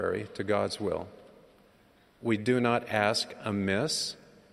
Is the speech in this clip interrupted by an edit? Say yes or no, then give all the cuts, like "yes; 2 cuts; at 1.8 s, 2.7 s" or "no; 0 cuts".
no; 0 cuts